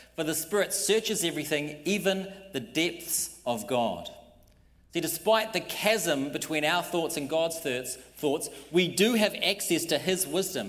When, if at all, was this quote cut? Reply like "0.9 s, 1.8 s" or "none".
none